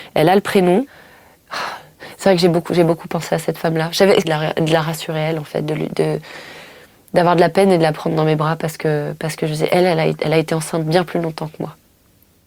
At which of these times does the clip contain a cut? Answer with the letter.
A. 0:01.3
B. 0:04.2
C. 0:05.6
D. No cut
B